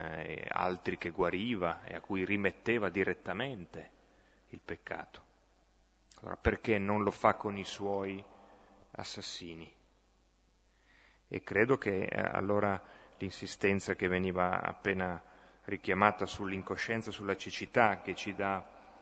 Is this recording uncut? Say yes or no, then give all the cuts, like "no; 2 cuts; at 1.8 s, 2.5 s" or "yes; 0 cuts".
yes; 0 cuts